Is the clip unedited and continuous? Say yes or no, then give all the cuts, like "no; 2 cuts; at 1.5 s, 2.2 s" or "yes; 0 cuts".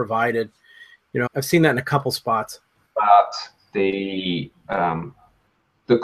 no; 2 cuts; at 1.3 s, 2.8 s